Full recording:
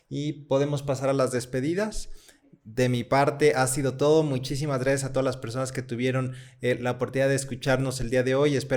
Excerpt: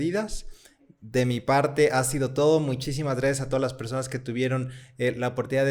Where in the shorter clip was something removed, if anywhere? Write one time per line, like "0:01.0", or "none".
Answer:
none